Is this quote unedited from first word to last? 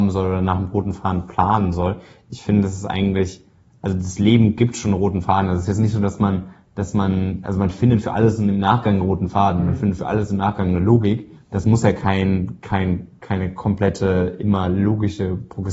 yes; 0 cuts

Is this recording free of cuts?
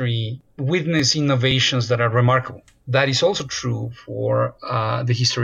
yes; 0 cuts

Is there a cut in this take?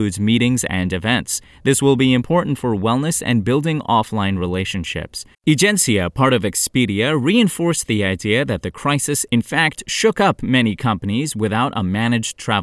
yes; 1 cut; at 5.3 s

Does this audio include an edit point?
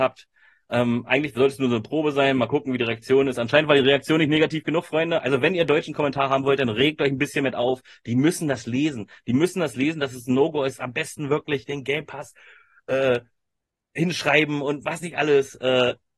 no; 0 cuts

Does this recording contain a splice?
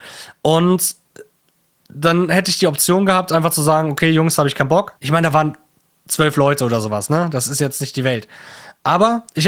yes; 1 cut; at 5.0 s

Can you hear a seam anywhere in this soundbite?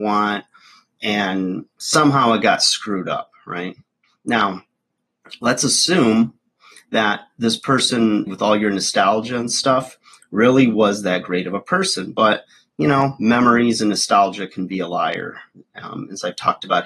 yes; 1 cut; at 8.3 s

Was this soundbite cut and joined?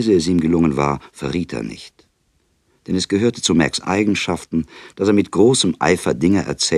no; 0 cuts

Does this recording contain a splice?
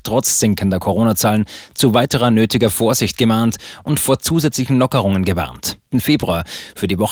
yes; 1 cut; at 5.9 s

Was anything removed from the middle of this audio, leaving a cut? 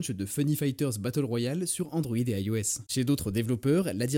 yes; 1 cut; at 2.9 s

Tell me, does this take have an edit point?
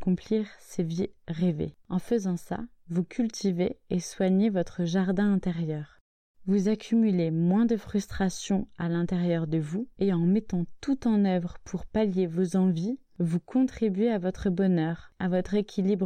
yes; 1 cut; at 10.0 s

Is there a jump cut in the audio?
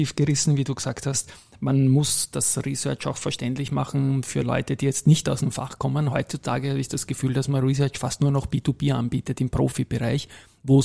no; 0 cuts

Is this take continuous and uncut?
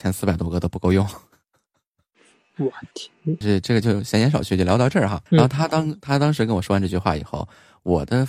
no; 2 cuts; at 3.4 s, 5.3 s

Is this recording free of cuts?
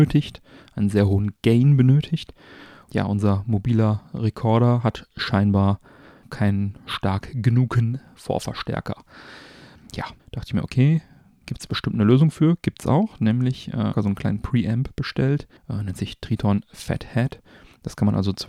no; 3 cuts; at 10.2 s, 13.9 s, 15.6 s

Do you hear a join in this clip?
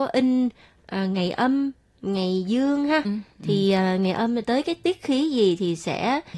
yes; 1 cut; at 3.0 s

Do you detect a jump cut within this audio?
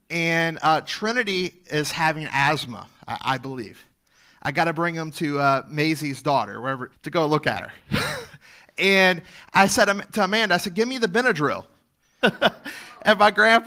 yes; 2 cuts; at 6.9 s, 12.2 s

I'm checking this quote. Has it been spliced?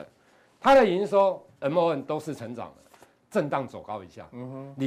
yes; 1 cut; at 3.2 s

